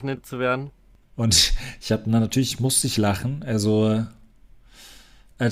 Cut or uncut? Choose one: cut